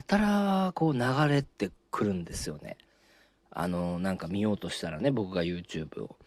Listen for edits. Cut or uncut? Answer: uncut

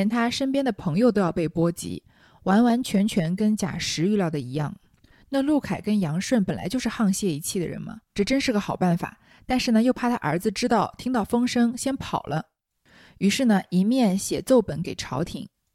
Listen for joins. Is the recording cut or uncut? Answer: cut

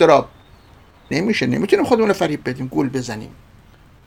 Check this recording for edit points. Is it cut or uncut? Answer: cut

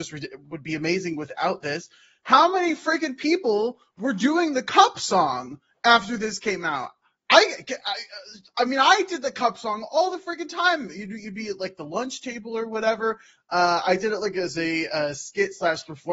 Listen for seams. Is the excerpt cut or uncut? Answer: uncut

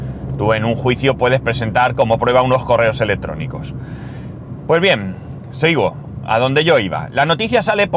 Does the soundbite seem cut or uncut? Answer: uncut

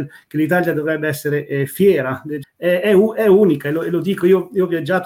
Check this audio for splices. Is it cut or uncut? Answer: cut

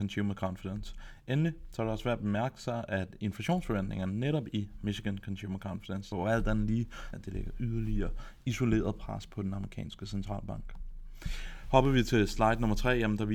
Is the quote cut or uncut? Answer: cut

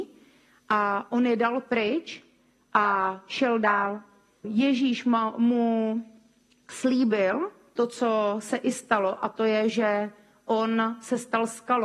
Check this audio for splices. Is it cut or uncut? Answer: cut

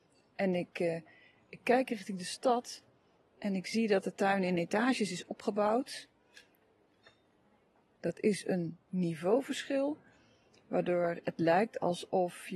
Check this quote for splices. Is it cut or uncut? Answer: cut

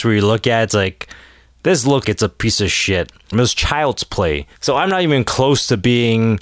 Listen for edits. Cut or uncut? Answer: cut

